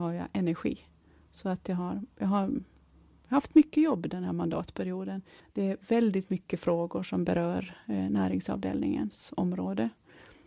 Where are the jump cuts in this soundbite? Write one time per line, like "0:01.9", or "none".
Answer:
0:05.4